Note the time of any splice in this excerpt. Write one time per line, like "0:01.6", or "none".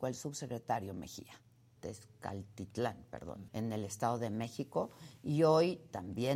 0:01.8
0:03.5